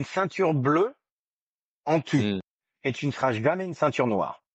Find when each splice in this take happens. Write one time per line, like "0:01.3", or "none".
none